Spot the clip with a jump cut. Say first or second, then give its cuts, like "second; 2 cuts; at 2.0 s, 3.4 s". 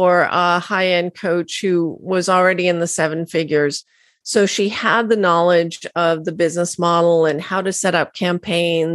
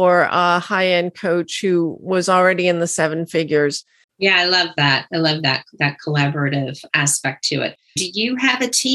second; 2 cuts; at 4.0 s, 8.0 s